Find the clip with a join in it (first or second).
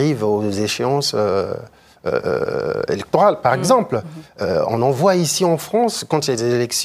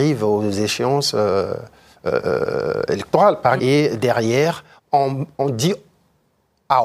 second